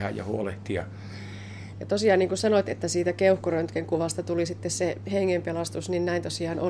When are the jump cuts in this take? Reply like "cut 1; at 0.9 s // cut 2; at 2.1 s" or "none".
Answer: cut 1; at 1.7 s